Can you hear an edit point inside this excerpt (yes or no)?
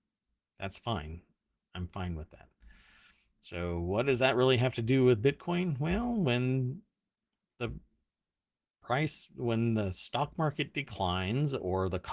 no